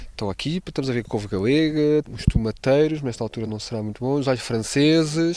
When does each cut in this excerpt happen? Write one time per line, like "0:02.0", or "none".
0:03.5

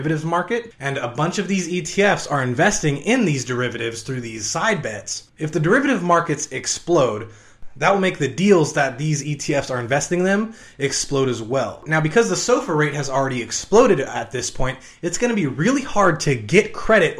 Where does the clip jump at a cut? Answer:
none

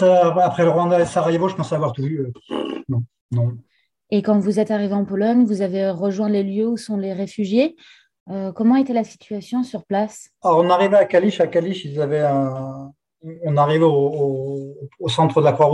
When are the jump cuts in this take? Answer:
none

